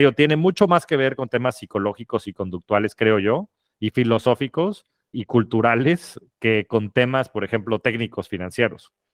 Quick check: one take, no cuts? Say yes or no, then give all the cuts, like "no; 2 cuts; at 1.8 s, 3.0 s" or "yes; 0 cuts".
no; 1 cut; at 5.1 s